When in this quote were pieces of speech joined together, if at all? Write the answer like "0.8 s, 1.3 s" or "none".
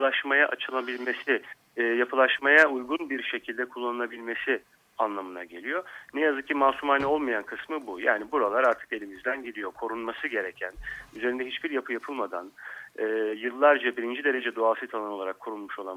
none